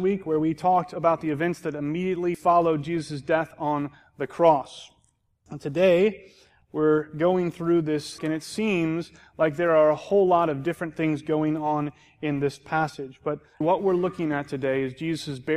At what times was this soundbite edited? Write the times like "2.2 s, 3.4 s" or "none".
8.2 s, 13.6 s